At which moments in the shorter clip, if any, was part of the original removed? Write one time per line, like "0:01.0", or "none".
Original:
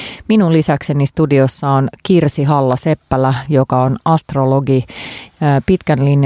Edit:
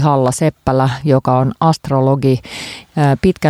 none